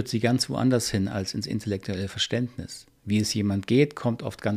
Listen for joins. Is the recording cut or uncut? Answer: cut